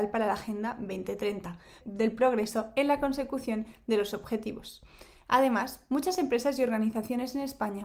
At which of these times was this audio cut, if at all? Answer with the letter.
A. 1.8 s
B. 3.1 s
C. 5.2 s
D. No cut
A